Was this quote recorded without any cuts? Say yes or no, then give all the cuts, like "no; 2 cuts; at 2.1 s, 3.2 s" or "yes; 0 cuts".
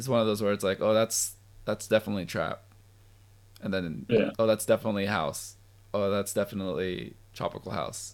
yes; 0 cuts